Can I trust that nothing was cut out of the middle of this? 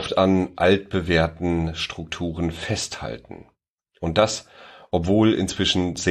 yes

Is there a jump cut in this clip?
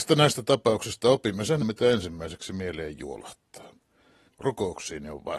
yes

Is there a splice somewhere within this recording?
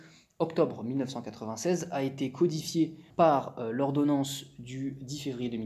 yes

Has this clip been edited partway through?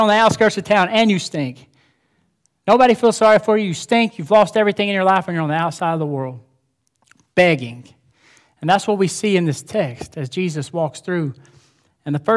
no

